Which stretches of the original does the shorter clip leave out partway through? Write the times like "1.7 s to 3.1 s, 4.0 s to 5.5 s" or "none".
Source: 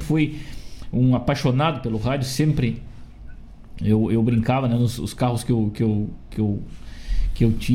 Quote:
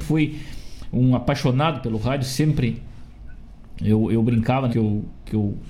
4.7 s to 5.7 s